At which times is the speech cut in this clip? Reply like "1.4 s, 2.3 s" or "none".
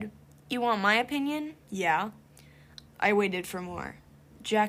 1.6 s, 2.9 s